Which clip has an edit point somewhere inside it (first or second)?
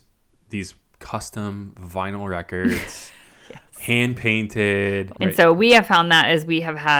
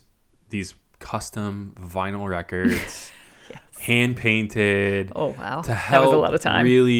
first